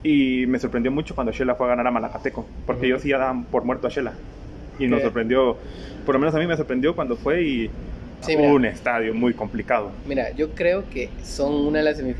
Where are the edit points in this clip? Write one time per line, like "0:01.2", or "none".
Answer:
0:08.2